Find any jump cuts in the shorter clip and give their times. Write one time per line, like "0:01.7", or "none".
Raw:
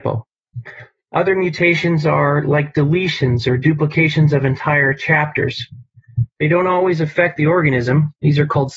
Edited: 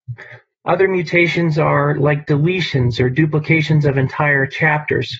none